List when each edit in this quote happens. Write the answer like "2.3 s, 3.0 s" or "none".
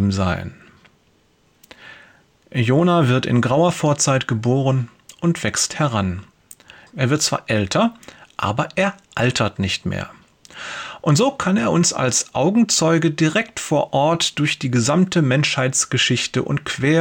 6.9 s